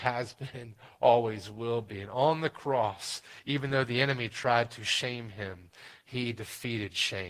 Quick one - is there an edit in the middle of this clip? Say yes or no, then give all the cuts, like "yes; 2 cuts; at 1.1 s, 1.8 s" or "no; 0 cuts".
no; 0 cuts